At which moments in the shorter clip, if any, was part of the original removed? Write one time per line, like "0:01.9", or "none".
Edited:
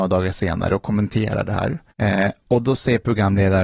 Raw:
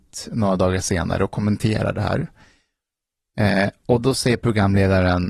0:01.9